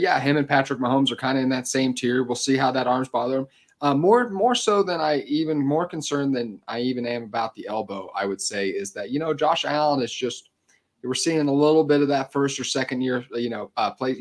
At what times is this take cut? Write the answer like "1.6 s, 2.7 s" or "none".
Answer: none